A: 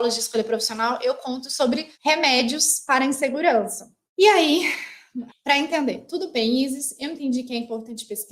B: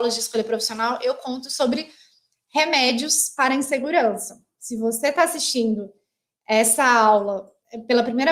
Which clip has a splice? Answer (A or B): A